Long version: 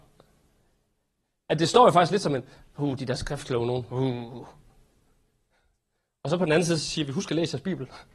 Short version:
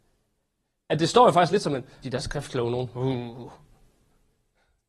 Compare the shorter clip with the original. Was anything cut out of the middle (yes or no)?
yes